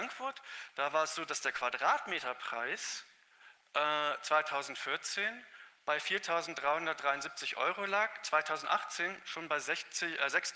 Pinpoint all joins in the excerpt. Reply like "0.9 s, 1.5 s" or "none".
none